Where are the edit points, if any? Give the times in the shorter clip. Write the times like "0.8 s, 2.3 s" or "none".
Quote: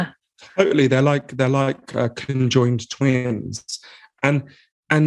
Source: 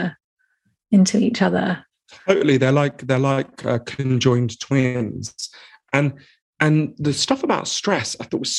none